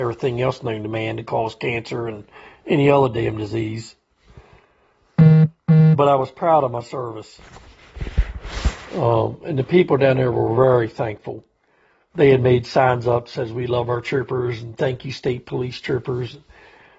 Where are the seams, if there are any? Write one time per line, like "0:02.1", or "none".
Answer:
none

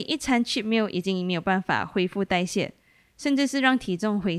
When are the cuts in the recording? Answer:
0:03.0

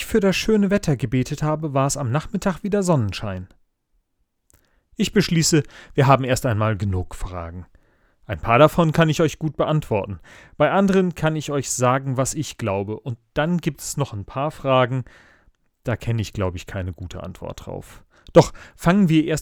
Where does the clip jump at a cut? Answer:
none

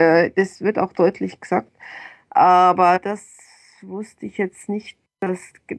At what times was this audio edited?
none

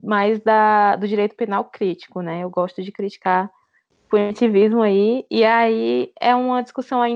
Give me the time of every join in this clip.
none

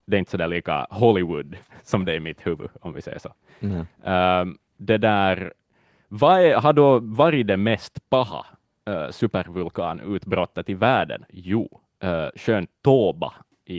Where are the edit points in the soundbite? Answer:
none

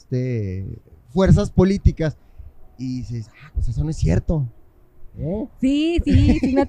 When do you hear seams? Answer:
0:03.5
0:05.1

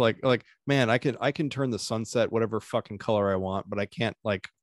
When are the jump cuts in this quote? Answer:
none

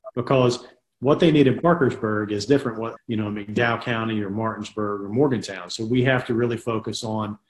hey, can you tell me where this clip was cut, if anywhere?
0:03.0

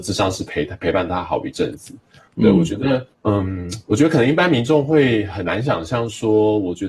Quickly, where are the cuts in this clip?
0:03.1

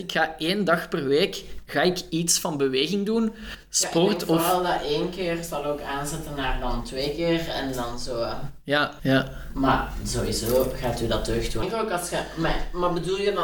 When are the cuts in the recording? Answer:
0:09.0
0:11.6

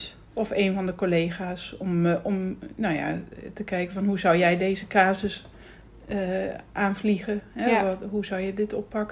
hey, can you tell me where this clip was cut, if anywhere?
none

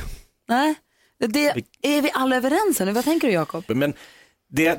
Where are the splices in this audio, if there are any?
0:03.7

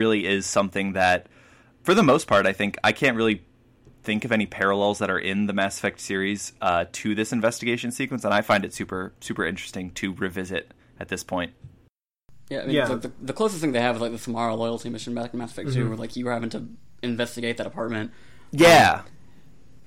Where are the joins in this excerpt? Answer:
none

